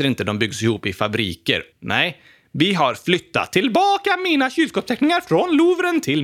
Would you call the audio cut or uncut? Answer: cut